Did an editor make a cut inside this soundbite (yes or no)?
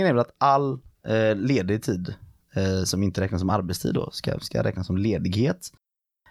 no